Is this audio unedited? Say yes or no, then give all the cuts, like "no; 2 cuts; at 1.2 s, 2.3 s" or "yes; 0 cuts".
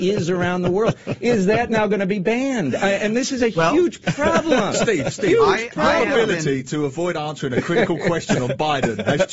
yes; 0 cuts